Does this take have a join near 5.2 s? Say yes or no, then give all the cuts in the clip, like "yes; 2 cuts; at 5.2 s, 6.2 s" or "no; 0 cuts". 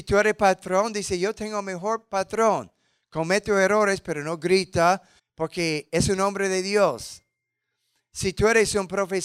yes; 1 cut; at 5.2 s